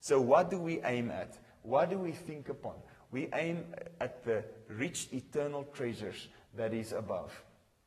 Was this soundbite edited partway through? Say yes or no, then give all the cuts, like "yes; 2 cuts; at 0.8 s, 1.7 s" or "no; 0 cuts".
no; 0 cuts